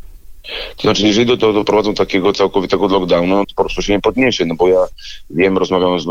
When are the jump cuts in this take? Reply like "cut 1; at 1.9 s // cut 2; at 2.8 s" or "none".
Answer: cut 1; at 3.4 s